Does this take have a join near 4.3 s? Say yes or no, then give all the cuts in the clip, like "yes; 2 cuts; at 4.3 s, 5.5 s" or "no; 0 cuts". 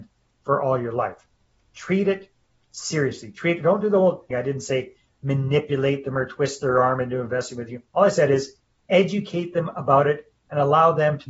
yes; 2 cuts; at 4.3 s, 7.9 s